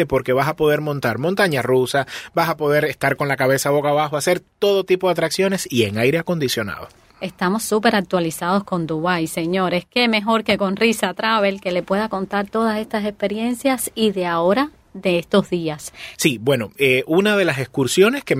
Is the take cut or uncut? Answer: cut